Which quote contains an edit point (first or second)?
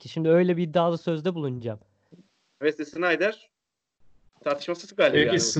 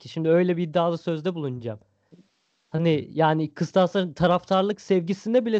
first